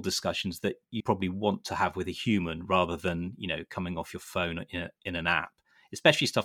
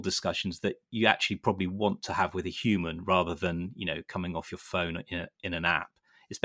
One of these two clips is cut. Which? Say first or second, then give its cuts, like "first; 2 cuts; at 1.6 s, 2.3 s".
first; 1 cut; at 1.0 s